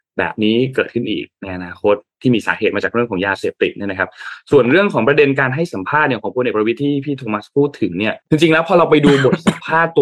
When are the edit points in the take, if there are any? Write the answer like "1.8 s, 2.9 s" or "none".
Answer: 8.2 s